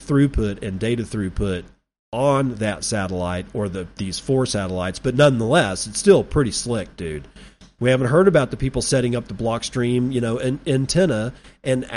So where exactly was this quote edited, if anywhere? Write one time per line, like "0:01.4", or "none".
0:07.8